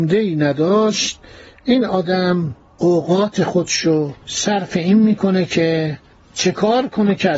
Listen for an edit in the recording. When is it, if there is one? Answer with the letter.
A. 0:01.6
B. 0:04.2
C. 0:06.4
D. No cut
B